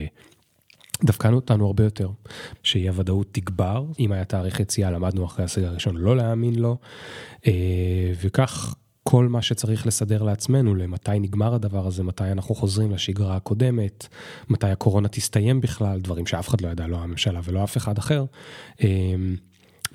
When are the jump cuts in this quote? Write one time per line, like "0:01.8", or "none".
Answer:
0:02.5
0:04.0